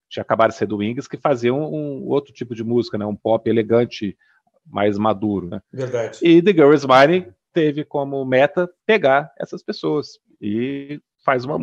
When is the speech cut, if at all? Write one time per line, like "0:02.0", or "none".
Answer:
none